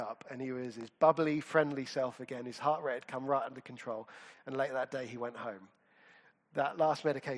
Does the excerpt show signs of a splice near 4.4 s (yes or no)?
no